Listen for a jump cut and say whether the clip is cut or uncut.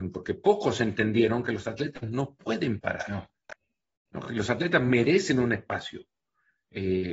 uncut